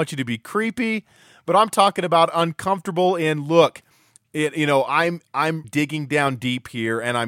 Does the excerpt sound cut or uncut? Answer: cut